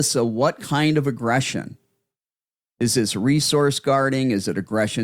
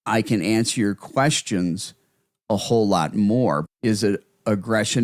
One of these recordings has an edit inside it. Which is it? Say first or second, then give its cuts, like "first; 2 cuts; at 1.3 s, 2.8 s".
second; 1 cut; at 3.6 s